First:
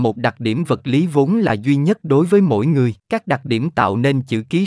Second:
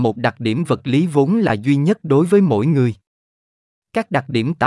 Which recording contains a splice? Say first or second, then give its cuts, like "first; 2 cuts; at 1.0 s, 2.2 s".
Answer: first; 1 cut; at 3.0 s